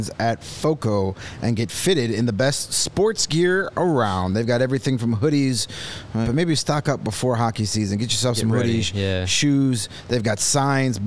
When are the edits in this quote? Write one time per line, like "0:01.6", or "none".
0:06.2